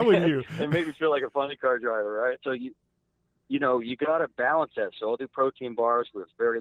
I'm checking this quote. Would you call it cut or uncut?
cut